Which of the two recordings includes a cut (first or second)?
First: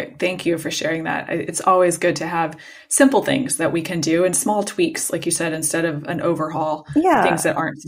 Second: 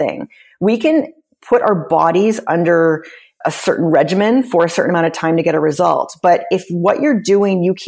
second